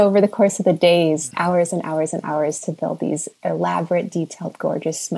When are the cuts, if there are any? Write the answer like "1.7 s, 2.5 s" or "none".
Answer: 1.3 s